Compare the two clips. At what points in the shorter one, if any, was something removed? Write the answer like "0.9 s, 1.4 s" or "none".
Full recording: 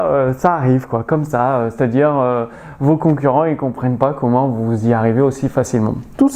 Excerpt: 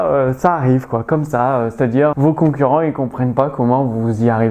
2.1 s